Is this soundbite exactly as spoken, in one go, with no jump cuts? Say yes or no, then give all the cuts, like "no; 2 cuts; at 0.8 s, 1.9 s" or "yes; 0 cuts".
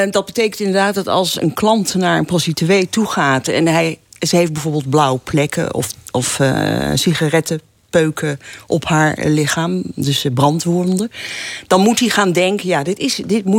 yes; 0 cuts